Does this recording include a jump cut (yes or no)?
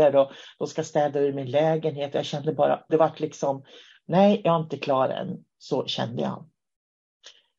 yes